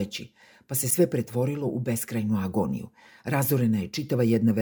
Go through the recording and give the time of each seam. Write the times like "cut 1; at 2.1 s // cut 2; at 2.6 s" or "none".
none